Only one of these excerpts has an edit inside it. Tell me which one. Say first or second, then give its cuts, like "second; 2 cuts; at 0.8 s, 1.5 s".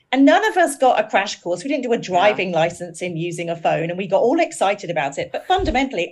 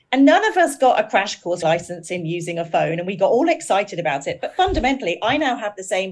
second; 1 cut; at 1.6 s